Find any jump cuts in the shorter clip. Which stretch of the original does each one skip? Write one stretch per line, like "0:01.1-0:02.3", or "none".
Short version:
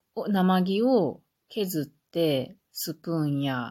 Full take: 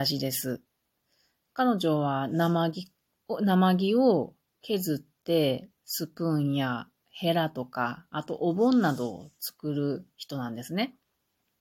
none